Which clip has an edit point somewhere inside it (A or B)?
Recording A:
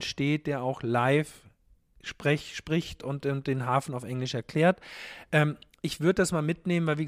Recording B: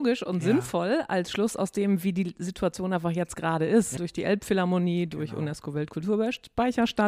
B